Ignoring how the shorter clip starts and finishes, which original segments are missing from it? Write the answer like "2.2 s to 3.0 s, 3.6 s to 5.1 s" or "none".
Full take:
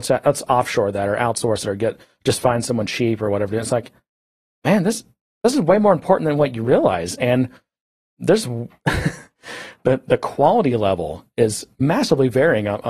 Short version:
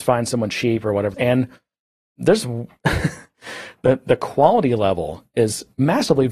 3.5 s to 7.2 s